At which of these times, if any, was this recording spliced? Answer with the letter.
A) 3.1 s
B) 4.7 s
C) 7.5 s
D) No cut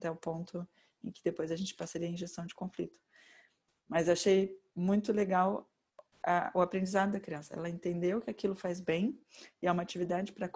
D